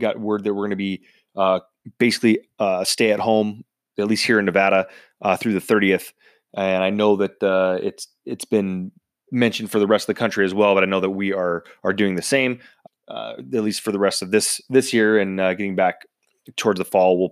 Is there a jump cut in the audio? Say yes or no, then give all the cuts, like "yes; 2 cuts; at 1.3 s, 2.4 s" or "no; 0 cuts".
yes; 1 cut; at 12.9 s